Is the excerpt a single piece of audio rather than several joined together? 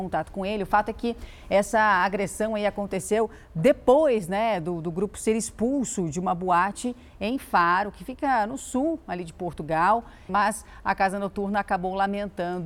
no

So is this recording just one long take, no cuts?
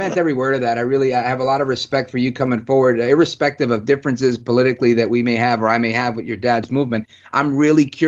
yes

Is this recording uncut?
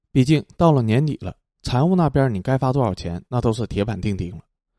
yes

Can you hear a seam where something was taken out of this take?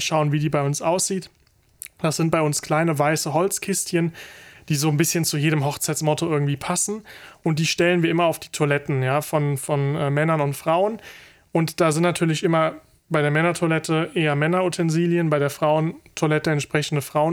no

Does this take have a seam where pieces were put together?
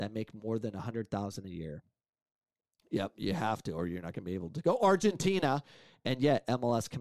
no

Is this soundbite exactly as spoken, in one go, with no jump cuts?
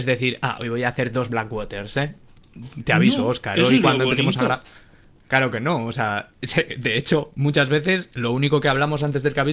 yes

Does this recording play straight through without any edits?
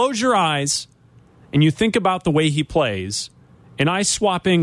yes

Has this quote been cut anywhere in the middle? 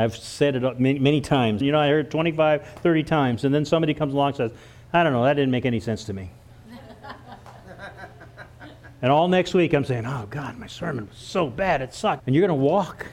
yes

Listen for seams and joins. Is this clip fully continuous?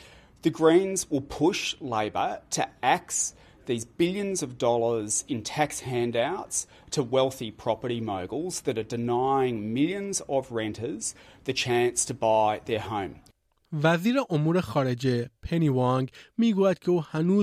yes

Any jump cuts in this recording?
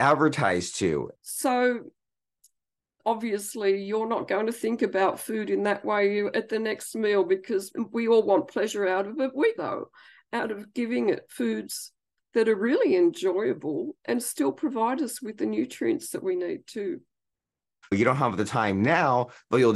yes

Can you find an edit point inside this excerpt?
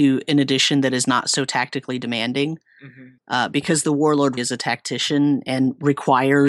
yes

